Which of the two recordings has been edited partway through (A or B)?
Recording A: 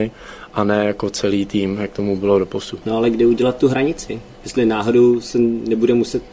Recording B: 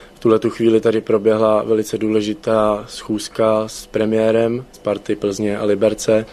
B